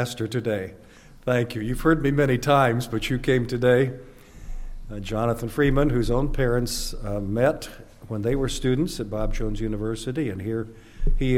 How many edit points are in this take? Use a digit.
0